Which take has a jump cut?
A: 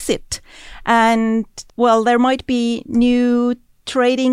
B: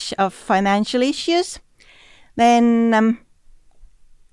A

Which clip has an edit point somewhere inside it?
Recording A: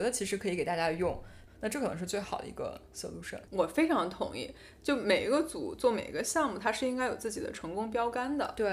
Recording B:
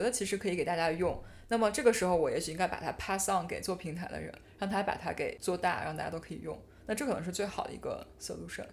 A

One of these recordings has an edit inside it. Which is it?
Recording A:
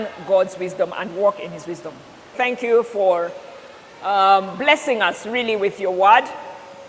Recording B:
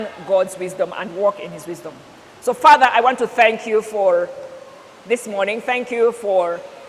A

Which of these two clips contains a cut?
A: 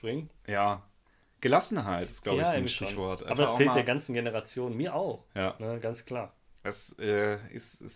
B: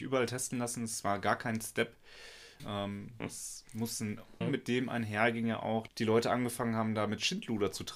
B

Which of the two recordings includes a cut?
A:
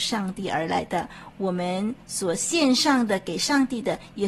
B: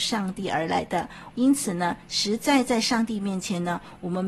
B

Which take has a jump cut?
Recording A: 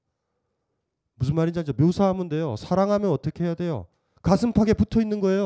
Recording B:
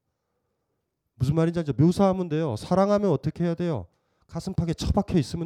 A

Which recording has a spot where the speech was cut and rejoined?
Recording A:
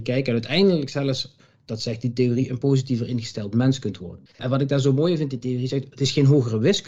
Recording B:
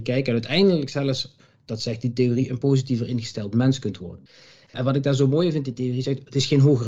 A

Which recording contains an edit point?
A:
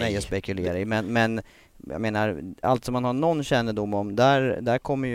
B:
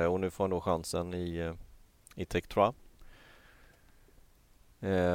A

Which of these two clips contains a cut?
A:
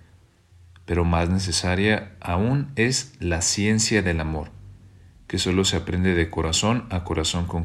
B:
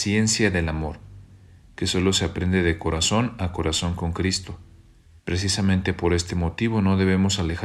B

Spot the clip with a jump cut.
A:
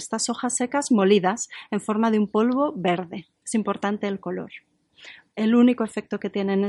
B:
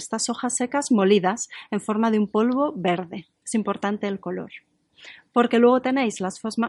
A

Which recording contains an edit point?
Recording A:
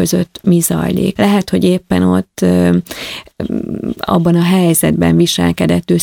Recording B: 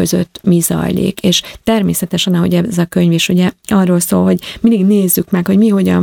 A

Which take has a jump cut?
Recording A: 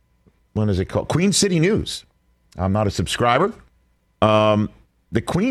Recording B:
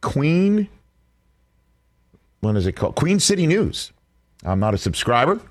A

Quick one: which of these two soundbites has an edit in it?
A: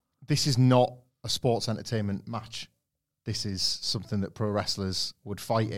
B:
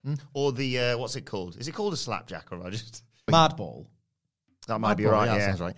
B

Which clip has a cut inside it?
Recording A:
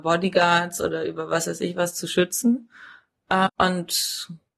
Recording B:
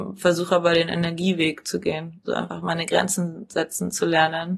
B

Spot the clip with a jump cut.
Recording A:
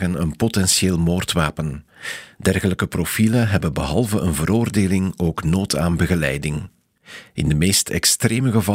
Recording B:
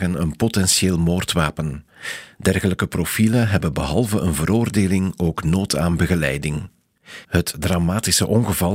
B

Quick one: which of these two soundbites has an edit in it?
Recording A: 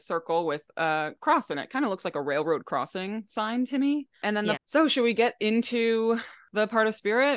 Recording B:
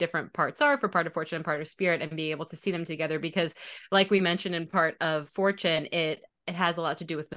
A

